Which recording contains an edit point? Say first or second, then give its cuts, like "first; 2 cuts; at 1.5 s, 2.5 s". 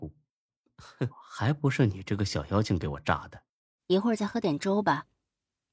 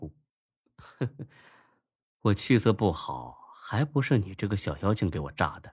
first; 2 cuts; at 1.1 s, 3.8 s